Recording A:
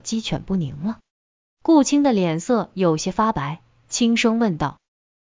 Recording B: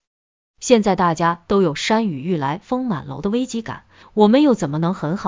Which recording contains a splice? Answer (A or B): B